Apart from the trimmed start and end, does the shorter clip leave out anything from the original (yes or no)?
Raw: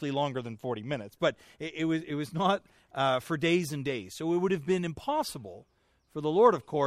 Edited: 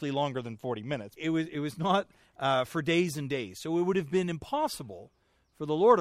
yes